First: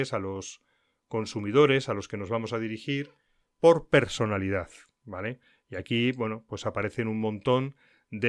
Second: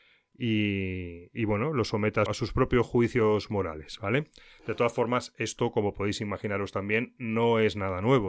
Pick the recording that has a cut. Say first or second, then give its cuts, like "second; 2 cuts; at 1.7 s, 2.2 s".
second; 1 cut; at 2.3 s